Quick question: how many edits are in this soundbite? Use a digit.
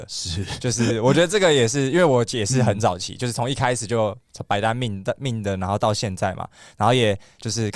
0